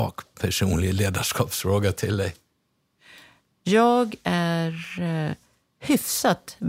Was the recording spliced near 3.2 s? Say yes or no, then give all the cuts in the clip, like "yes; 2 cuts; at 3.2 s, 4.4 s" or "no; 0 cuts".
no; 0 cuts